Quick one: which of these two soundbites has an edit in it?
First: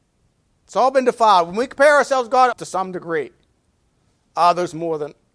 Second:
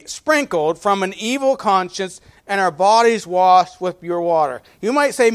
first; 1 cut; at 2.5 s

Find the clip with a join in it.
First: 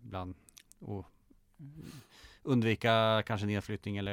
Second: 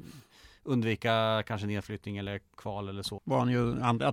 second; 1 cut; at 3.2 s

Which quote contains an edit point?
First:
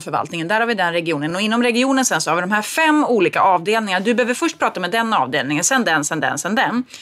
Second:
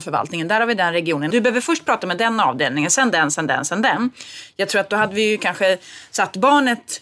second; 1 cut; at 1.3 s

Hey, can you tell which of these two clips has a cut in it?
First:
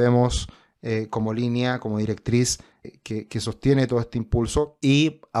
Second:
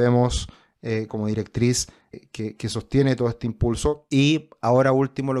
second; 1 cut; at 1.1 s

